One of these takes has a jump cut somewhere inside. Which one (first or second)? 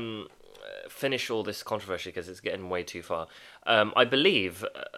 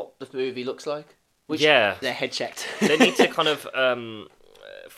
second